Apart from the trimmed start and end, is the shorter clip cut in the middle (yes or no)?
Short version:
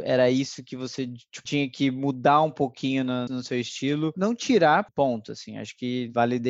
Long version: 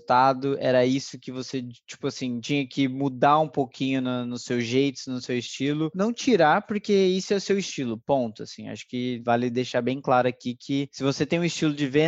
yes